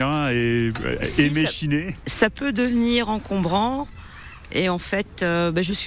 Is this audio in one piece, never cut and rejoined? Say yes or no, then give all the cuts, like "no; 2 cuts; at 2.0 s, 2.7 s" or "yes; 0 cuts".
yes; 0 cuts